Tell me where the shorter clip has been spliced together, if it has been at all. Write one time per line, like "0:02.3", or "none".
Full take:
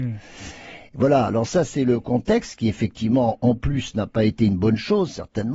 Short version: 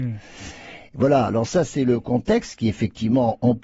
none